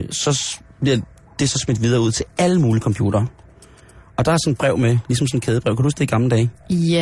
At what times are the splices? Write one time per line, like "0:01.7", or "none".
none